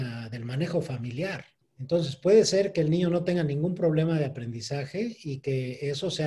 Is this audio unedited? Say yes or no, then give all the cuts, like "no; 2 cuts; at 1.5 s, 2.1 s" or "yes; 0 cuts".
no; 1 cut; at 1.6 s